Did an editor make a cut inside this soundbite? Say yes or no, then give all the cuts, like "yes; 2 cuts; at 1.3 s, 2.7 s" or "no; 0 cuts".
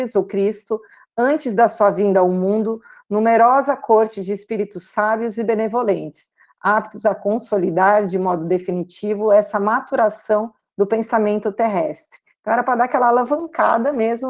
no; 0 cuts